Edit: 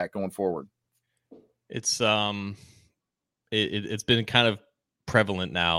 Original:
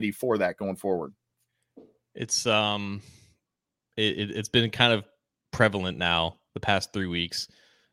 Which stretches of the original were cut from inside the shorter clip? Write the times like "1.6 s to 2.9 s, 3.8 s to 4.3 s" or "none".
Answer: none

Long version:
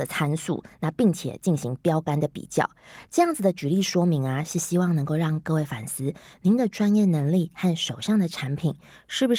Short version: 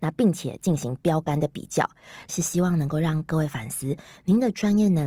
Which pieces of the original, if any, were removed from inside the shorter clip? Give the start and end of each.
3.1 s to 4.5 s

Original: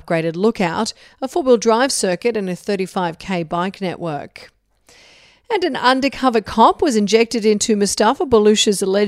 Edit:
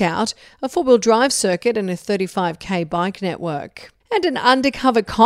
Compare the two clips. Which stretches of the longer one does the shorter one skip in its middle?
4.6 s to 5.4 s

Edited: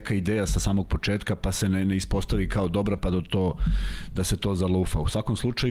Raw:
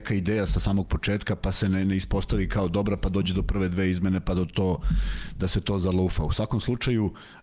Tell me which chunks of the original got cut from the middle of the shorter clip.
3.0 s to 4.2 s

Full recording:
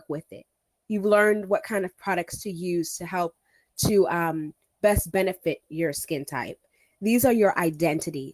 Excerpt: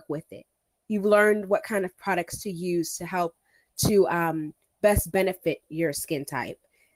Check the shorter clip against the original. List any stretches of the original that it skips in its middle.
none

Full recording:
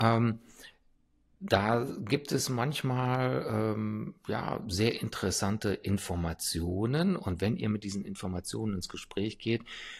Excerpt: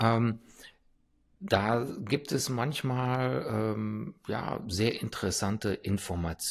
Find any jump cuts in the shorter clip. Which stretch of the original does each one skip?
none

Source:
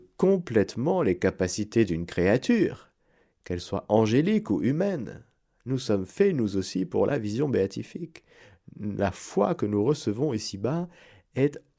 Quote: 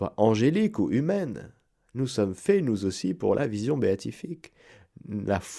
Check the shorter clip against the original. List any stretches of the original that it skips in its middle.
none

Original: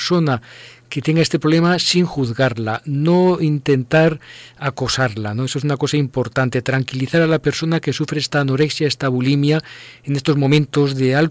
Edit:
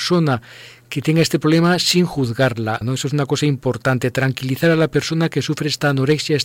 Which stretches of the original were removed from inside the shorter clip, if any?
2.8 s to 5.3 s

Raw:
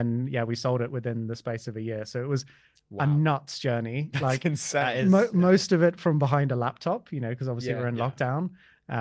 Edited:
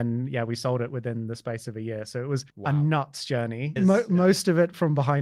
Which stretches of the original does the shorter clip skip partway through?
2.5 s to 2.8 s, 4.1 s to 5.0 s

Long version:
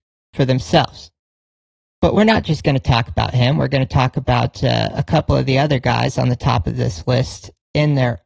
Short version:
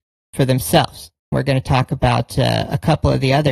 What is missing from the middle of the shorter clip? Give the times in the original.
1.3 s to 3.6 s

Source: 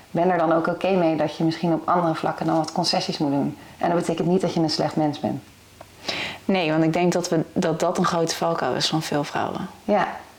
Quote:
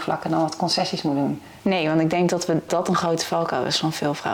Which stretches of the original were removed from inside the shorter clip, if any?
3.8 s to 6.4 s, 7.5 s to 7.8 s

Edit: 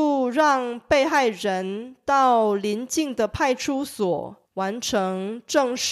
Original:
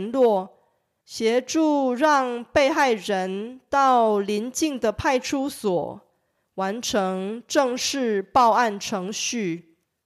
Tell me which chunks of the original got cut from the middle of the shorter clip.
6.1 s to 6.5 s

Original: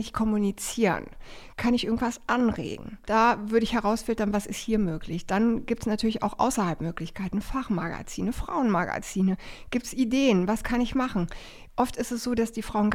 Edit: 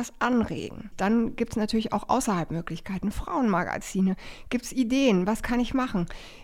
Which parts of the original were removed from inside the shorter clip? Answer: 3.0 s to 5.2 s, 7.4 s to 8.3 s

